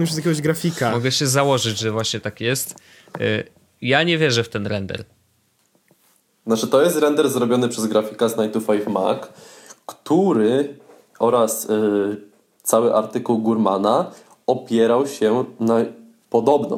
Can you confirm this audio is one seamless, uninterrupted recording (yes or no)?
yes